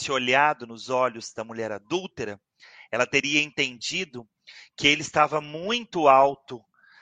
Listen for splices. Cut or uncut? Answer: uncut